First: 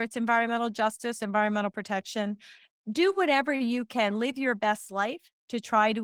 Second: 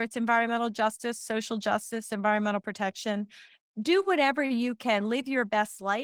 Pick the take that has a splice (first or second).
first